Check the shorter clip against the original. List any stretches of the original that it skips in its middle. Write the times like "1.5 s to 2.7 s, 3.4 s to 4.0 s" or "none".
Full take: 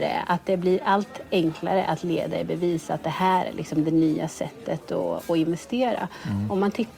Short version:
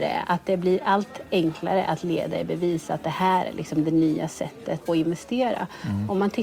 4.9 s to 5.3 s